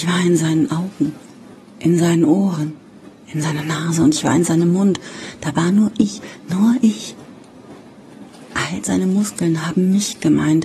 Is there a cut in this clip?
no; 0 cuts

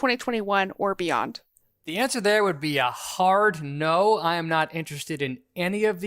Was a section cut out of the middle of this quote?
no; 0 cuts

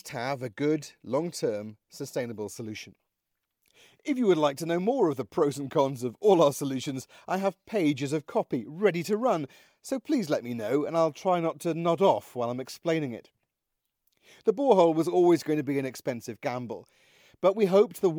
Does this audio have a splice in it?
no; 0 cuts

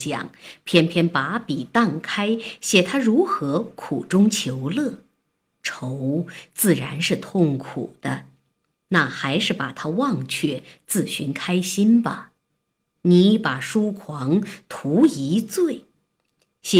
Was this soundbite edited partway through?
no; 0 cuts

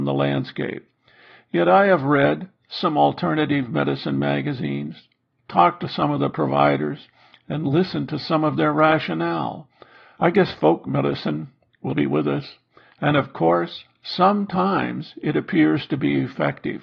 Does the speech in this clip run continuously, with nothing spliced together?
no; 2 cuts; at 10.2 s, 11.9 s

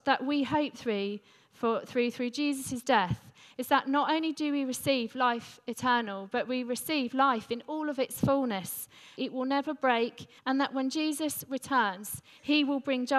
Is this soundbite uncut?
no; 2 cuts; at 9.2 s, 10.4 s

